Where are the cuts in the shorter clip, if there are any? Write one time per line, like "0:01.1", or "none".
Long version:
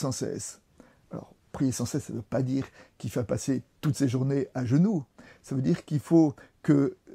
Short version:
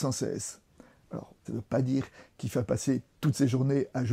0:01.4